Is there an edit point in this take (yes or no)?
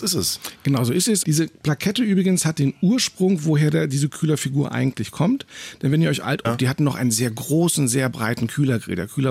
yes